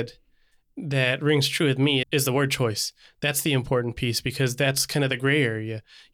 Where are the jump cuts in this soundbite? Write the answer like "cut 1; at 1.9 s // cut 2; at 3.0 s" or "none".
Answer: cut 1; at 2.0 s